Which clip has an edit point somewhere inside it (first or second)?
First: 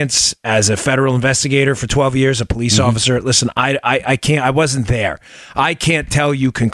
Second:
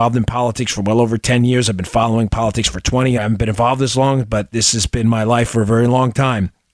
second